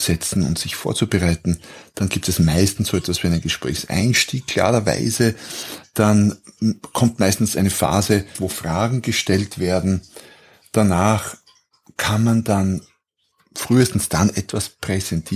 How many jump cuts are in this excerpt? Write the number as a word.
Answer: one